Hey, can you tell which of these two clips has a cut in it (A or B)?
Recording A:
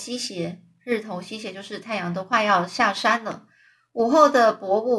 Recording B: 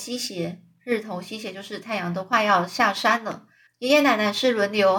B